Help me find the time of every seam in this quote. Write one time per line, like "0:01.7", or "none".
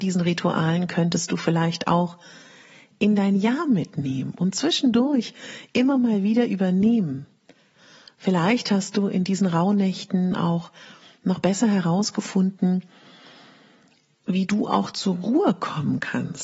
none